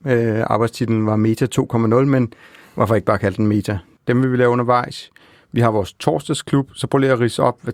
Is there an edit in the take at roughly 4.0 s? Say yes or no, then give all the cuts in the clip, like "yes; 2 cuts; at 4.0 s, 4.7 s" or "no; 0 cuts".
yes; 1 cut; at 4.0 s